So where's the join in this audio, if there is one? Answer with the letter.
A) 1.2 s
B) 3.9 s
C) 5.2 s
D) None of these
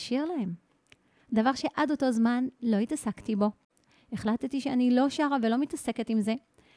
D